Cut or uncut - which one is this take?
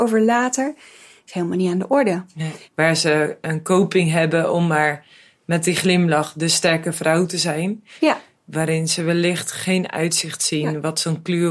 cut